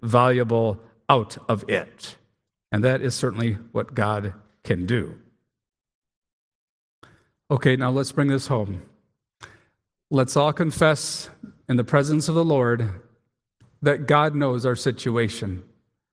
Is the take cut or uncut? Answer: uncut